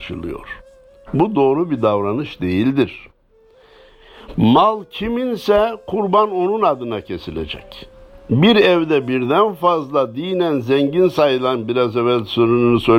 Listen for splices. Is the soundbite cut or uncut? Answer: uncut